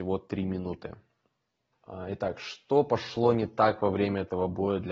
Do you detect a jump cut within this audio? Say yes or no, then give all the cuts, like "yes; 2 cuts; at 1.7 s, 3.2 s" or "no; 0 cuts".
yes; 1 cut; at 1.7 s